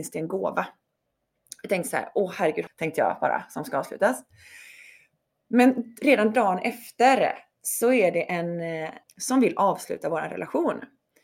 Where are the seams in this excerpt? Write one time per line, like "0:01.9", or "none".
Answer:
0:02.7
0:09.0

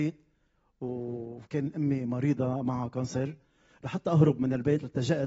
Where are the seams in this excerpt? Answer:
none

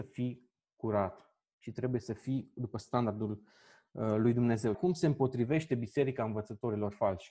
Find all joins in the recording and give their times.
0:04.7

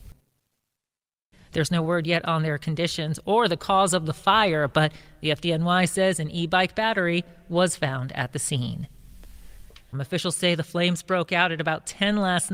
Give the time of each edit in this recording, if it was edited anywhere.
0:01.3
0:09.9

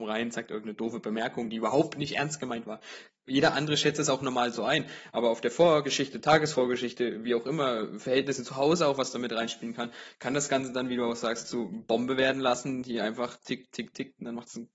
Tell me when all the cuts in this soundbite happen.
none

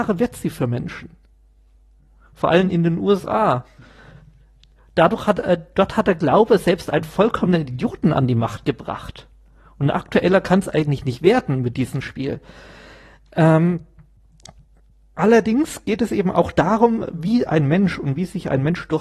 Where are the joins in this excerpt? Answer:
none

